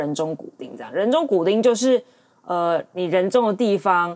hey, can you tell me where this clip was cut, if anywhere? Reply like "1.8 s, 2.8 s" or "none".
none